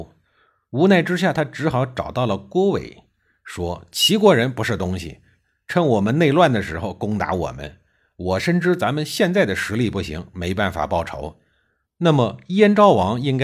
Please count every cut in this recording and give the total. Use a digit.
1